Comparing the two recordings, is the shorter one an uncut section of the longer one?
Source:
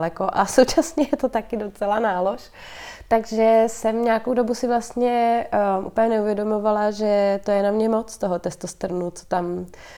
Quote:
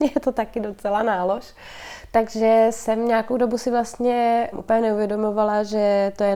no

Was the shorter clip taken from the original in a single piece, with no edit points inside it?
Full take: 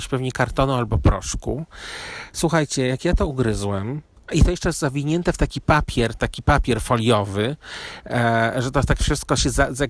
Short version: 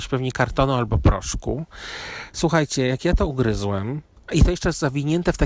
yes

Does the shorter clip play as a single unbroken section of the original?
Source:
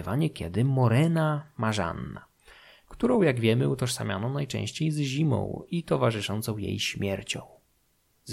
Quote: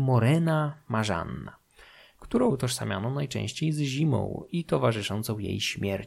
no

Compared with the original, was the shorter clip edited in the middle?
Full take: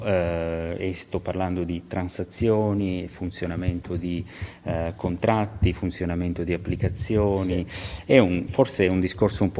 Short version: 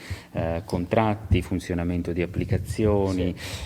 no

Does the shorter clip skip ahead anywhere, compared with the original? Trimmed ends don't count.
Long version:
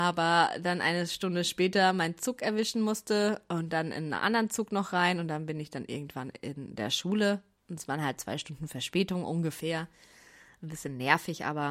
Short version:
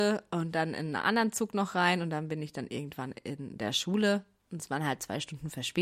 no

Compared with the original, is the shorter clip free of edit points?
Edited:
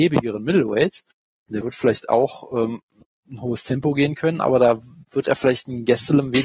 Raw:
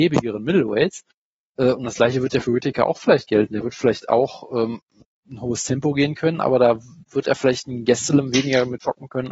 no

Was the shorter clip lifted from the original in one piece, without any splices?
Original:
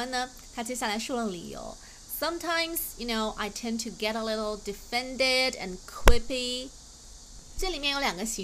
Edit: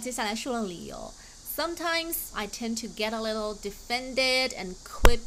no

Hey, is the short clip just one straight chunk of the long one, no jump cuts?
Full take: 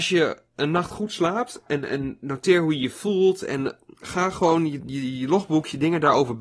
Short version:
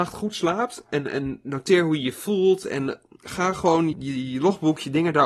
no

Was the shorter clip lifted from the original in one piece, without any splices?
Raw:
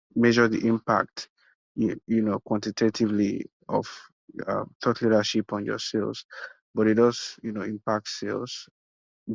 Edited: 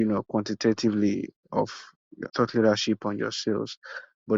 no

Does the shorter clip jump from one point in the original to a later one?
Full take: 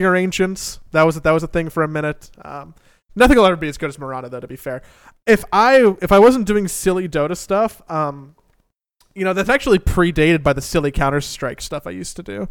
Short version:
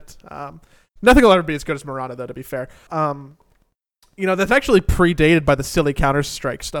yes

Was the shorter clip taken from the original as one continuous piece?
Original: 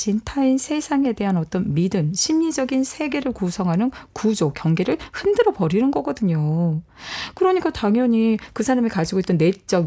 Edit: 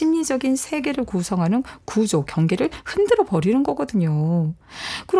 yes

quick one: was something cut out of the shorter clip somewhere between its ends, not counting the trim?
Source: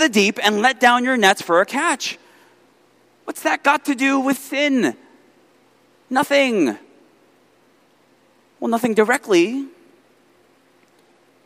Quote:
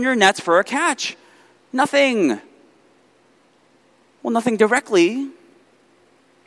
yes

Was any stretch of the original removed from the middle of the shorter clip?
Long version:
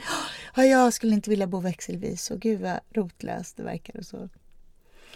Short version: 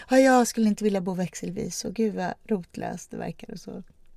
no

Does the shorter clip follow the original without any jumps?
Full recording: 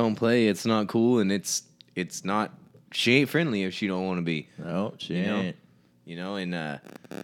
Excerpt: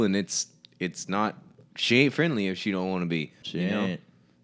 no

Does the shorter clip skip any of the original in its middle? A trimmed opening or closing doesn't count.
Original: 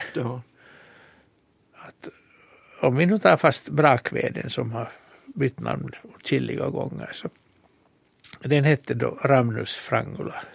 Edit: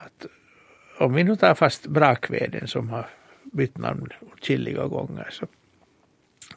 no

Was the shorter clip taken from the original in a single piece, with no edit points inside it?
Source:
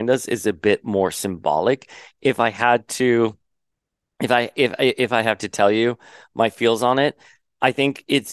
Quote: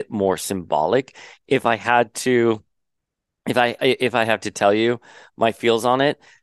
no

